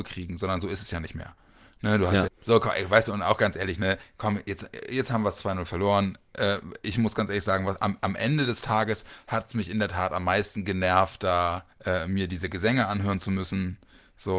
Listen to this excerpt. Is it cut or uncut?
cut